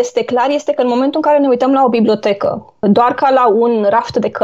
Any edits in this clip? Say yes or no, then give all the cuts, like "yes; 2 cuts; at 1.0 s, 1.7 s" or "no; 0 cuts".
no; 0 cuts